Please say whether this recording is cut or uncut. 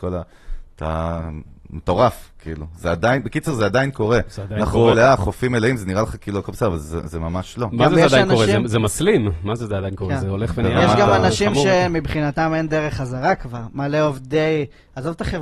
cut